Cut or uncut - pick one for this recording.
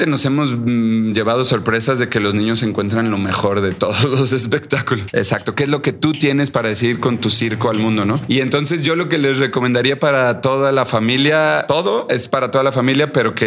cut